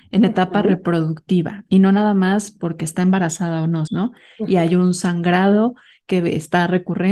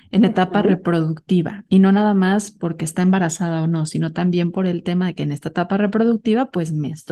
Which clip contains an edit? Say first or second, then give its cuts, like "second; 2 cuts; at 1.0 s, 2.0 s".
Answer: first; 1 cut; at 3.9 s